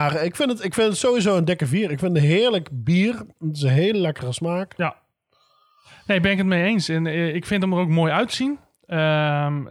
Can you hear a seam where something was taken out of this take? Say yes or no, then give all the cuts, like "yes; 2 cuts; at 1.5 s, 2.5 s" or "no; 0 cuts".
no; 0 cuts